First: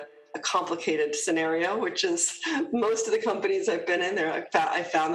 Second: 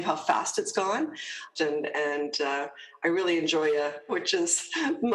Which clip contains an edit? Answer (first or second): second